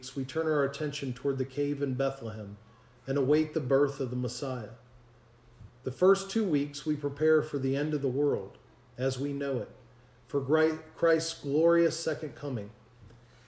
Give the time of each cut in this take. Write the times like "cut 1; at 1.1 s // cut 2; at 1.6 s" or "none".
cut 1; at 5.7 s